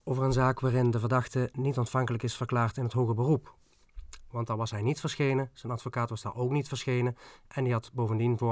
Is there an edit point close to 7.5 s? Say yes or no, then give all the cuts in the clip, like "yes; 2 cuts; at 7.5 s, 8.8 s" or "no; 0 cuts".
no; 1 cut; at 4.3 s